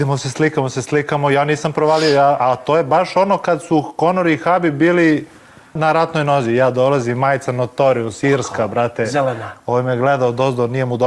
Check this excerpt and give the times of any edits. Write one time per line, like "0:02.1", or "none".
0:05.8